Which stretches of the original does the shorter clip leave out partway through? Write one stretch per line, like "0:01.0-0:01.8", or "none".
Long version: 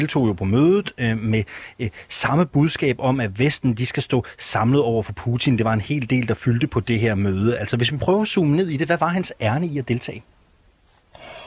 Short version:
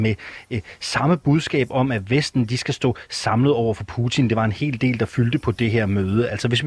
none